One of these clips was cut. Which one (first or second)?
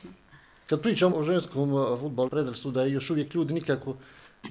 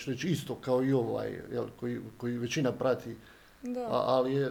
first